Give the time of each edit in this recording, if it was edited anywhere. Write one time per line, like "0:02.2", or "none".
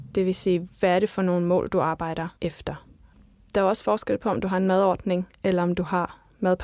0:02.4